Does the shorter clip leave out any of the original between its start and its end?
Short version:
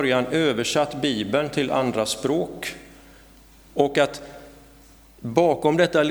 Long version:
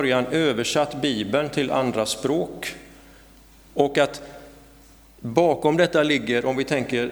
no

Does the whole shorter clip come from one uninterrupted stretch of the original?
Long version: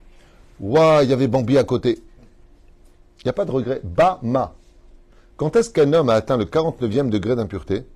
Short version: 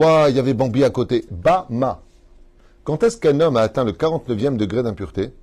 no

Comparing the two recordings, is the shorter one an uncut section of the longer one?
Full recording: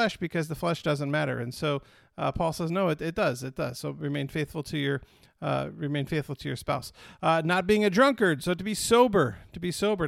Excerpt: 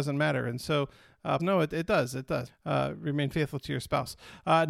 no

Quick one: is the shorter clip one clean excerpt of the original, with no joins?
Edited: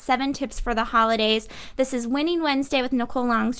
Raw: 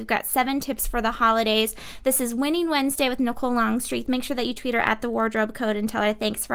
yes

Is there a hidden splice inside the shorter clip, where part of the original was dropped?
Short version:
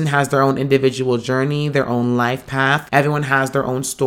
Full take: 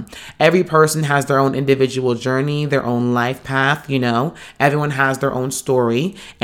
yes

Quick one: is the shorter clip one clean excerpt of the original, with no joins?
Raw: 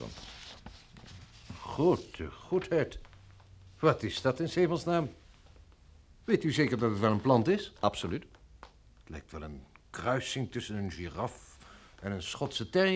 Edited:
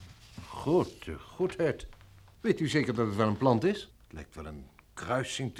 no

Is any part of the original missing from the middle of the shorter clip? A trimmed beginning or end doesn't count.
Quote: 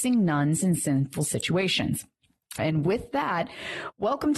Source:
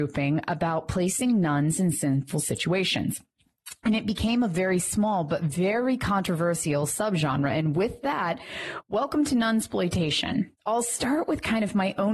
yes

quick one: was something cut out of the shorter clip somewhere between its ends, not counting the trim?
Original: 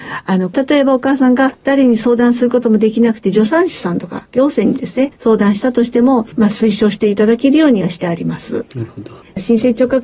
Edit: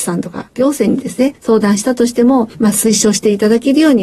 no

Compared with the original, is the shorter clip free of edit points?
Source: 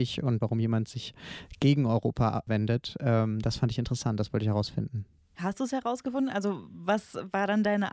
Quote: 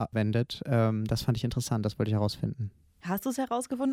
yes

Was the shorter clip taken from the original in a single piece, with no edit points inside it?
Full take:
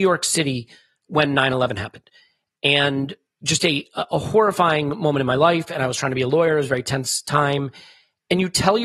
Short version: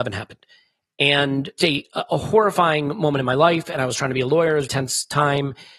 no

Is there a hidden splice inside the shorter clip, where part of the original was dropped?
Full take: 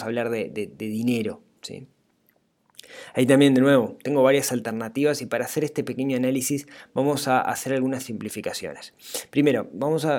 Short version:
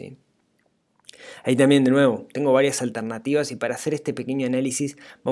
no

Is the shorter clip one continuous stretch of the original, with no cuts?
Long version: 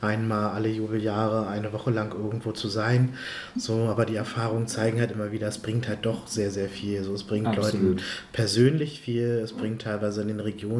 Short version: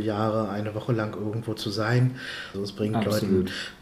no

